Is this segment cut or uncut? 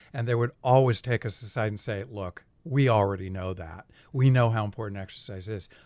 uncut